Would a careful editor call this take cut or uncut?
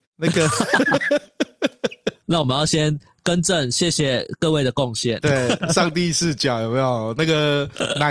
uncut